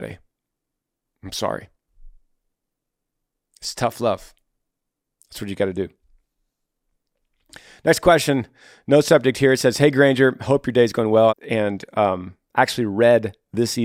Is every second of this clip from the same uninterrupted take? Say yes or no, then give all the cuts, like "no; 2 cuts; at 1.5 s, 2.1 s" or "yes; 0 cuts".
no; 1 cut; at 11.3 s